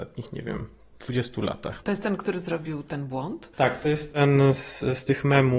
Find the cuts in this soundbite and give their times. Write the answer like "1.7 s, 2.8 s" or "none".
1.8 s

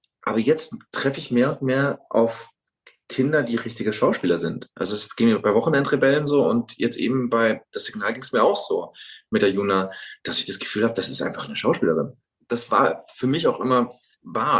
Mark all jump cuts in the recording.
7.7 s, 12.4 s

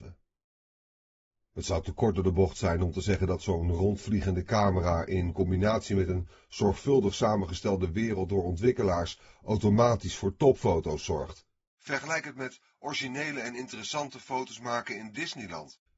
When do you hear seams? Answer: none

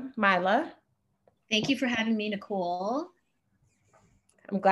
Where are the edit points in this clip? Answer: none

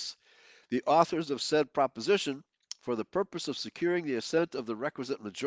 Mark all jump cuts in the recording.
none

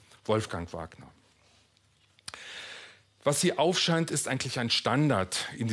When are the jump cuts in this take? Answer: none

